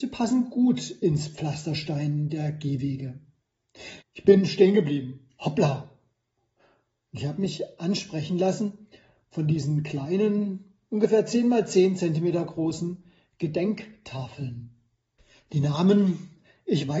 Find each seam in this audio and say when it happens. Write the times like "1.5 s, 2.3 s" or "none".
4.0 s